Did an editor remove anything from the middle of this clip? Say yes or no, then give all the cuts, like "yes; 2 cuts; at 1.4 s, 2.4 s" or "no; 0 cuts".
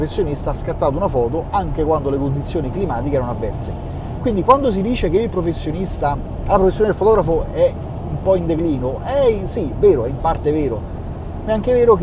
no; 0 cuts